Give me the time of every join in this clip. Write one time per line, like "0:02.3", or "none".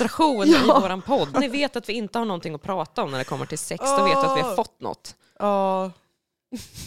0:01.3